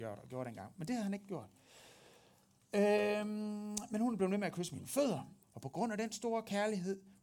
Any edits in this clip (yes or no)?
yes